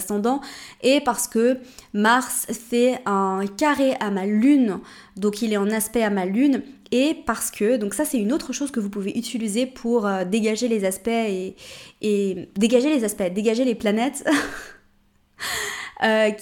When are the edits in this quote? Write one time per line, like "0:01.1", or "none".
none